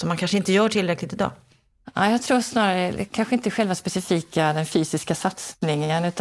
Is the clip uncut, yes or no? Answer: yes